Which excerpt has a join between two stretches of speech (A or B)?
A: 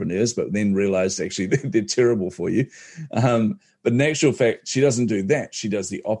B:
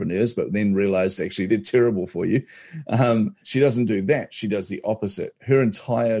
B